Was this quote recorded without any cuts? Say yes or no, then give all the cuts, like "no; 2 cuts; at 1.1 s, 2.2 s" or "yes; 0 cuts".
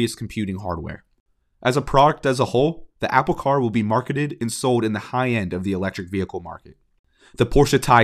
no; 1 cut; at 1.4 s